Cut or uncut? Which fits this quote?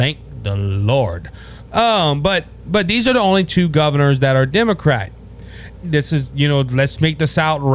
cut